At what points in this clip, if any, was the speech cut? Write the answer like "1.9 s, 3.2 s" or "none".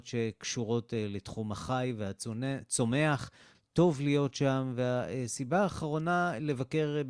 3.5 s